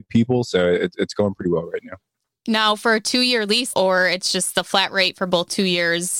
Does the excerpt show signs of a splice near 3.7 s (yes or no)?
yes